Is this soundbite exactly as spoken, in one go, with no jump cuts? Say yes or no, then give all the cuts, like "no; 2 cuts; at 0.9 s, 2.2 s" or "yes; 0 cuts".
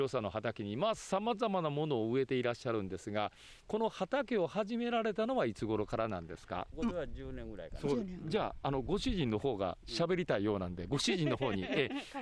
no; 1 cut; at 6.7 s